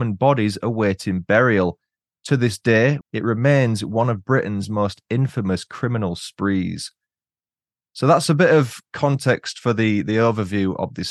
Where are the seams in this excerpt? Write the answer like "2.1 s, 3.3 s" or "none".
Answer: 3.0 s